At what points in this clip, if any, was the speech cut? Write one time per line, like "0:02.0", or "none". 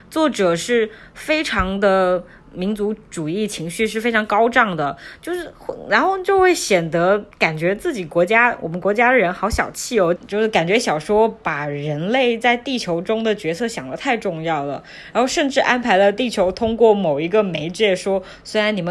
0:07.3
0:10.2